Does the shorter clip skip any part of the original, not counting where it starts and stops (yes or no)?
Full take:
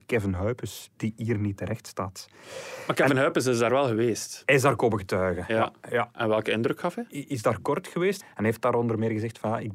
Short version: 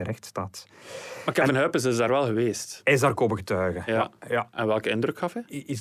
no